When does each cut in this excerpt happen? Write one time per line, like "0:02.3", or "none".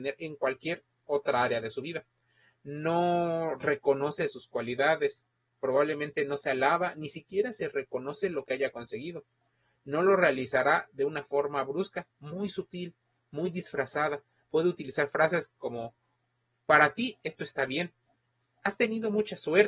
0:12.1